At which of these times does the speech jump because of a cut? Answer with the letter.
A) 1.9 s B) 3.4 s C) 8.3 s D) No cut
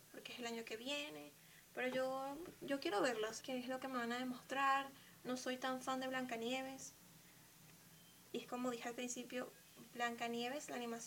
B